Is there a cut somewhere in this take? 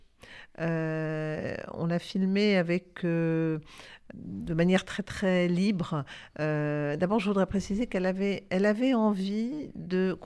yes; 1 cut; at 4.1 s

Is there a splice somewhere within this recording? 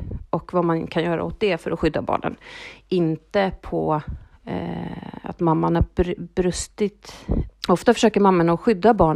yes; 1 cut; at 7.5 s

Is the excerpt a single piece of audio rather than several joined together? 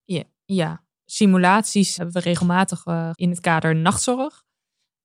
no; 2 cuts; at 2.0 s, 3.1 s

